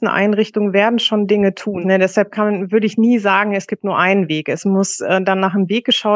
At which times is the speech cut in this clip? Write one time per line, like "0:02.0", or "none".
0:01.8

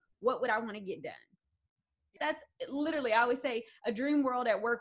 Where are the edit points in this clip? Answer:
0:02.2

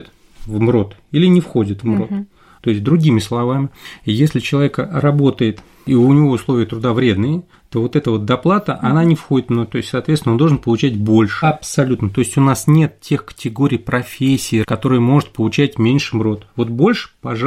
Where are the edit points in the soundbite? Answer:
0:02.6
0:11.4
0:14.6

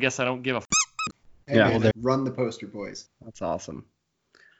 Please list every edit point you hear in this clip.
0:01.9
0:03.1

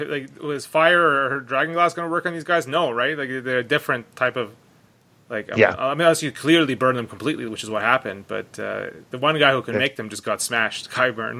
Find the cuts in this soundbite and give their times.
none

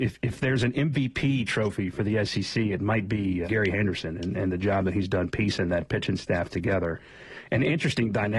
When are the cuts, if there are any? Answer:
0:03.4

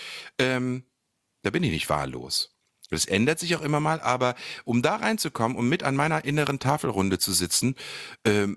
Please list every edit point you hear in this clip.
none

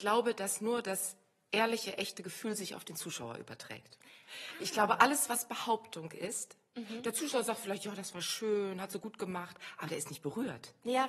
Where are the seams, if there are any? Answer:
none

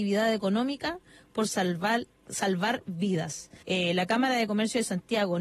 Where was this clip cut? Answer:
0:03.6

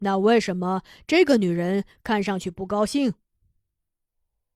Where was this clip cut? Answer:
none

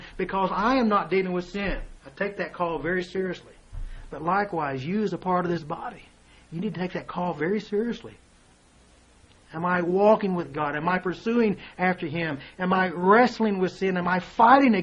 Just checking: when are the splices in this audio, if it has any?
0:02.0

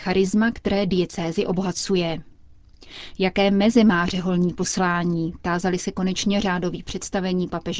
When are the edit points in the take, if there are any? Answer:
none

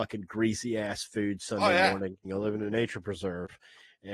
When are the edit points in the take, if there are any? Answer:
0:02.2

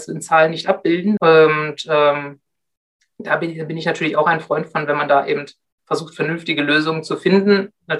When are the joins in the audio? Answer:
0:01.2

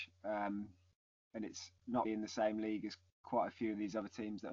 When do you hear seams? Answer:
0:02.0

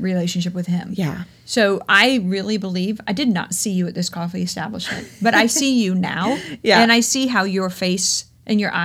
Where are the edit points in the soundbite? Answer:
none

